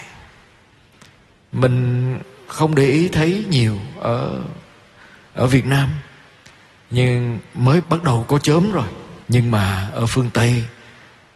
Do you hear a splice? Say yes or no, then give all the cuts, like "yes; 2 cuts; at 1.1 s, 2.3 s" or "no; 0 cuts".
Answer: yes; 2 cuts; at 7.8 s, 9.2 s